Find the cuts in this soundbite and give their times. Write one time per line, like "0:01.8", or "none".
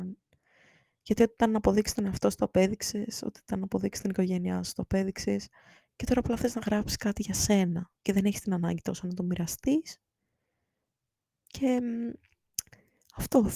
0:08.0